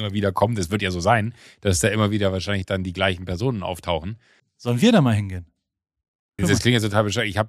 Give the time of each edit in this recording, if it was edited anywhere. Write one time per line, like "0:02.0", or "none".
0:04.4
0:06.4

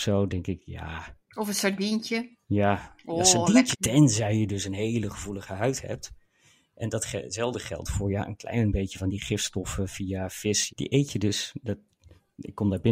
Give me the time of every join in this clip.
0:03.7
0:10.7

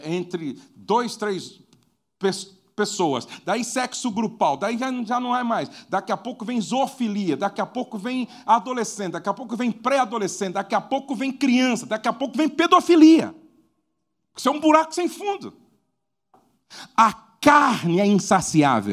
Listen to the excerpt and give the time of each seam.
none

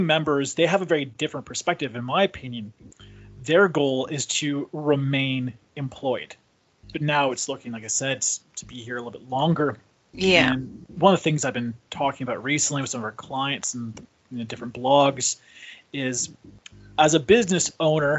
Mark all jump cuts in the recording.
0:06.9

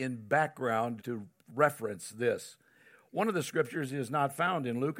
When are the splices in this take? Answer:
0:01.0

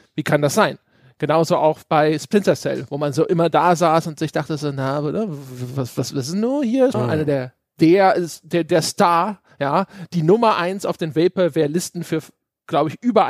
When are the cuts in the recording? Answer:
0:06.9

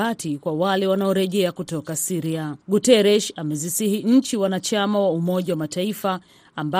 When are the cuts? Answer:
0:02.6

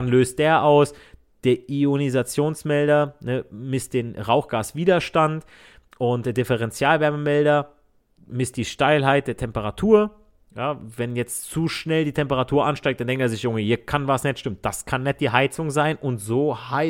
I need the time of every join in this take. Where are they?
none

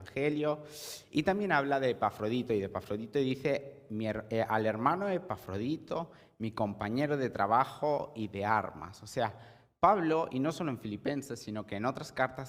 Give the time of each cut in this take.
none

